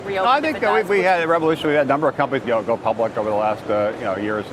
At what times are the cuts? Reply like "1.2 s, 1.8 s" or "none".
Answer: 2.4 s